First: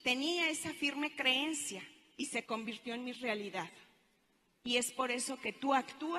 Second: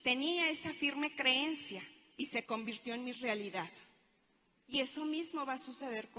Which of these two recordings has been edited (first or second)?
first